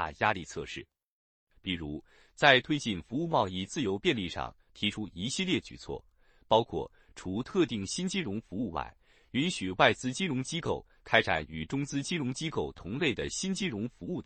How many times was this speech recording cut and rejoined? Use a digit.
0